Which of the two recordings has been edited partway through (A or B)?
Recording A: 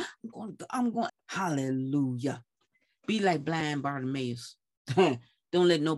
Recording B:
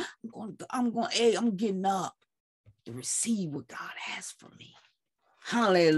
A